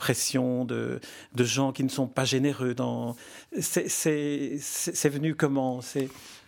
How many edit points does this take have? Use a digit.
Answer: 1